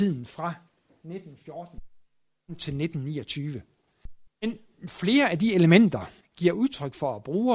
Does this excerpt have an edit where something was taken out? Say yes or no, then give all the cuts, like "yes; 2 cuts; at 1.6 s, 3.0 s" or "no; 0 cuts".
yes; 2 cuts; at 4.3 s, 6.2 s